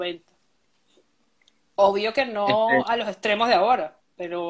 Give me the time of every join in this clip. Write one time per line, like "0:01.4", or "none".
none